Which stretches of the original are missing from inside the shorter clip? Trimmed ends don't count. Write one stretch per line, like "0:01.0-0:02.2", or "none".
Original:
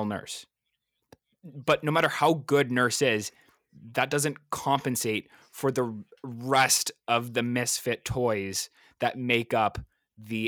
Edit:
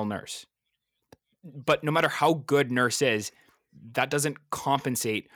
none